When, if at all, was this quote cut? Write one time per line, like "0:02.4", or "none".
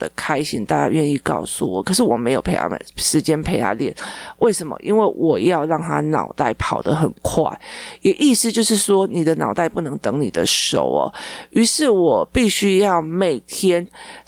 none